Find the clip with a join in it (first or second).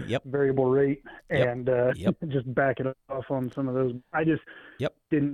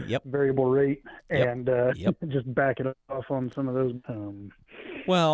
second